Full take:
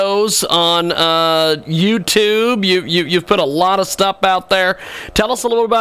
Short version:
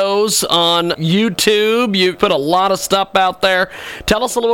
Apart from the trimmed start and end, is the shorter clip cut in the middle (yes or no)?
yes